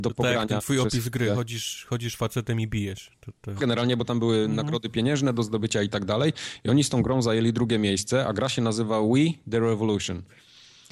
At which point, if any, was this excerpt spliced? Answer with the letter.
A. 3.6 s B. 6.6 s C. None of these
A